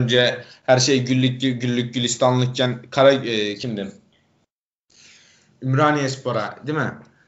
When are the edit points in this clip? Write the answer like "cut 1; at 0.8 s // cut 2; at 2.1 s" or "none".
none